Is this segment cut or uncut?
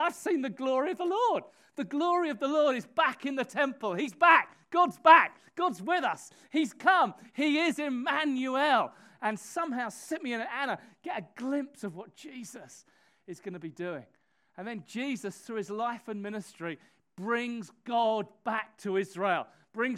uncut